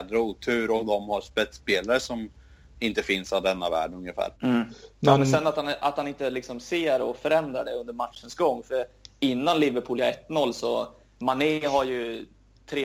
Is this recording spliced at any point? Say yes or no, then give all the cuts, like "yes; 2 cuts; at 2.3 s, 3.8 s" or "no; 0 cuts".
yes; 1 cut; at 4.3 s